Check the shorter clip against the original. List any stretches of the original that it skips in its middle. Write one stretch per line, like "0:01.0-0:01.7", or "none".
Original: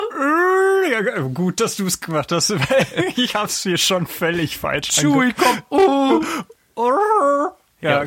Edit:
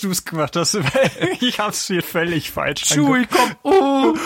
0:03.8-0:04.1